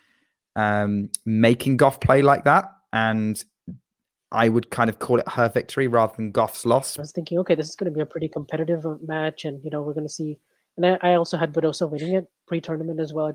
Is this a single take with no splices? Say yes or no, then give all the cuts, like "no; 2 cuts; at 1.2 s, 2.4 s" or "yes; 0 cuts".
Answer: no; 1 cut; at 7.0 s